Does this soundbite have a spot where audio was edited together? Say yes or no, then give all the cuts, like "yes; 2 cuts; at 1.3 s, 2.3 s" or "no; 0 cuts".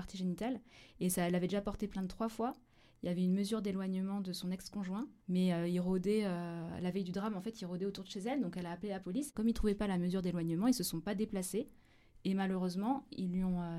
yes; 1 cut; at 5.2 s